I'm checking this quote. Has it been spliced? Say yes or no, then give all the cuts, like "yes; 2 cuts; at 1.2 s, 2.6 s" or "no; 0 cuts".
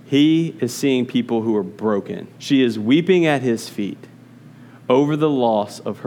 yes; 1 cut; at 2.3 s